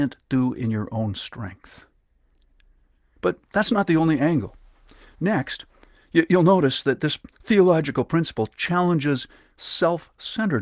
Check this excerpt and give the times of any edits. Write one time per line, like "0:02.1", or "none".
0:03.2